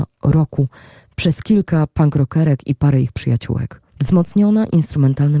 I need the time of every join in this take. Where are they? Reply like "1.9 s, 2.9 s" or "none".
3.9 s